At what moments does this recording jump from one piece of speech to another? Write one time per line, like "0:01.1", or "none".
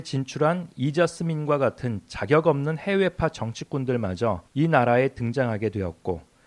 0:04.5